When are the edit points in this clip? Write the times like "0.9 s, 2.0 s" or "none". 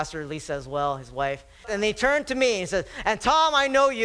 1.6 s